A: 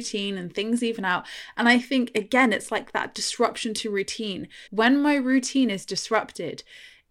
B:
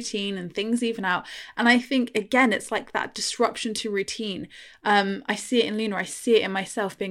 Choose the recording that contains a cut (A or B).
A